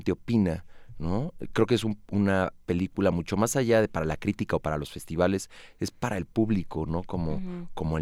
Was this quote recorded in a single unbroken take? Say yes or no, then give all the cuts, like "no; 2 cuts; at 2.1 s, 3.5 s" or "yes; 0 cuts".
yes; 0 cuts